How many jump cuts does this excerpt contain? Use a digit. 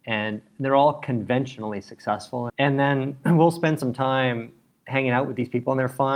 1